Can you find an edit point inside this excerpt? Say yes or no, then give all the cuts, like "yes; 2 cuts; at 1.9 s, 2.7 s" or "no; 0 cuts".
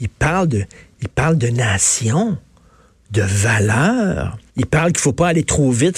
yes; 1 cut; at 4.5 s